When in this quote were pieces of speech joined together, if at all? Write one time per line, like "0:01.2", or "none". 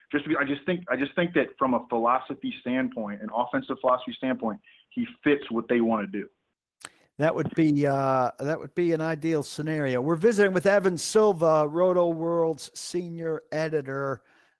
none

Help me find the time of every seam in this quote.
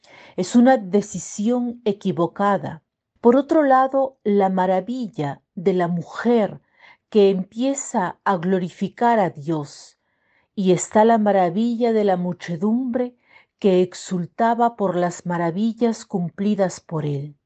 0:03.2

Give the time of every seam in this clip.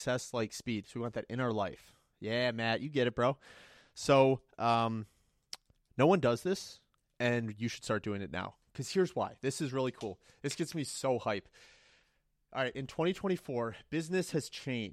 none

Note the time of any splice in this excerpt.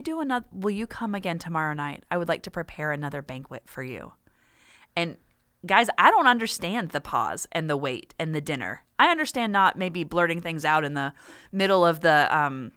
none

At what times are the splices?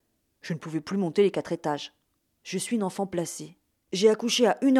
0:02.4
0:03.7

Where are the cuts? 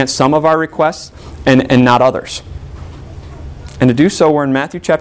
none

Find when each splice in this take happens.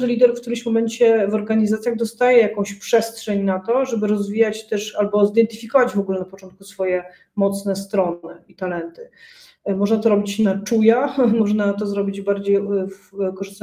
none

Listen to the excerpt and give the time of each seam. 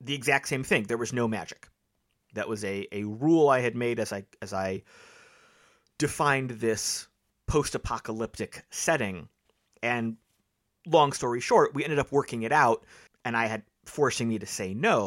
0:09.7
0:13.1

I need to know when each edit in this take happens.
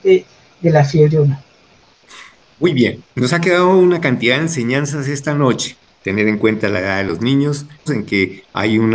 0:03.1
0:07.9

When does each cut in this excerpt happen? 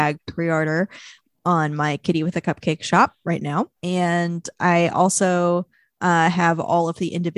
0:03.8

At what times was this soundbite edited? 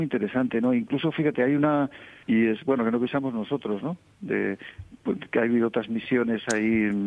0:02.2

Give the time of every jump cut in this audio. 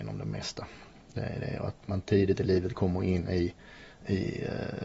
none

